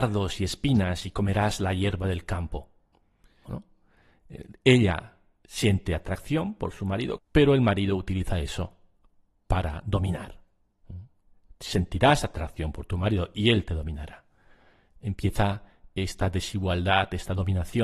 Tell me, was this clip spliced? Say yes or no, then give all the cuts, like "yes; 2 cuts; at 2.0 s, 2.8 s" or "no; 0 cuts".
yes; 2 cuts; at 3.5 s, 7.2 s